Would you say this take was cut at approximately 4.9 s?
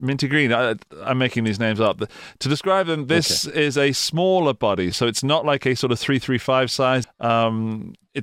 yes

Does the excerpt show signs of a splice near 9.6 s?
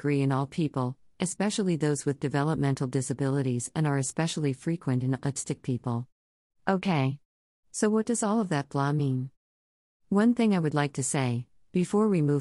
no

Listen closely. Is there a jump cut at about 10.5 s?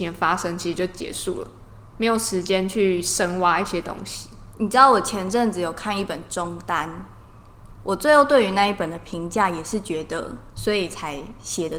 yes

